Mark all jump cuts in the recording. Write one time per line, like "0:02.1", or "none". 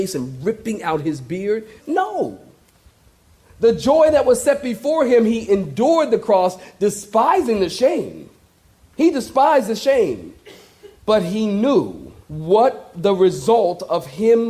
0:01.8
0:11.0
0:12.2